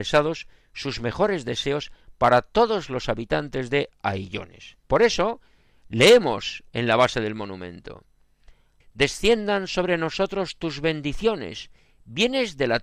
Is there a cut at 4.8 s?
yes; 2 cuts; at 4.8 s, 8.8 s

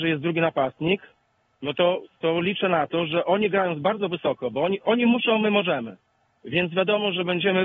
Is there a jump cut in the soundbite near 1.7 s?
no; 0 cuts

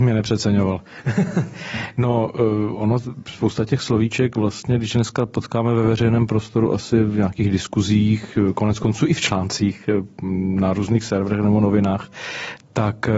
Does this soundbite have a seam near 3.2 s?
no; 0 cuts

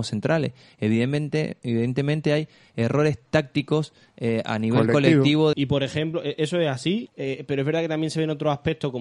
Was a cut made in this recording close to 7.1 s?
yes; 2 cuts; at 5.5 s, 7.1 s

